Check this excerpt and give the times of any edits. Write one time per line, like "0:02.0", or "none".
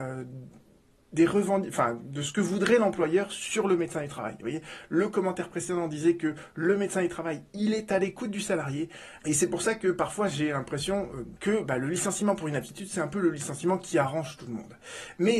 0:09.2
0:11.4